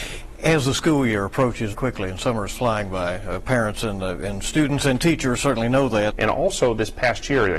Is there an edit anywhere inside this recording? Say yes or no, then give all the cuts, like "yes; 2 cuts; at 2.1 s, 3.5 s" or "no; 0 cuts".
yes; 2 cuts; at 1.7 s, 6.1 s